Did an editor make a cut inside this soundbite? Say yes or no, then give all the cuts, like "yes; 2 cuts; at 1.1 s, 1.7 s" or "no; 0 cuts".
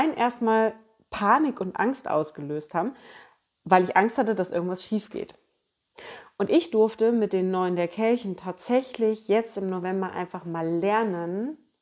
no; 0 cuts